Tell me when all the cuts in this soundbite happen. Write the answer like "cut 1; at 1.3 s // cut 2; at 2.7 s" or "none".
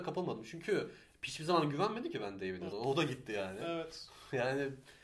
cut 1; at 2.7 s